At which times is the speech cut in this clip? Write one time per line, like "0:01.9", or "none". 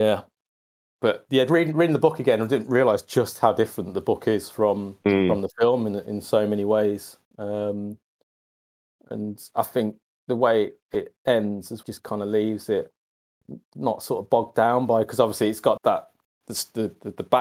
0:11.8
0:15.8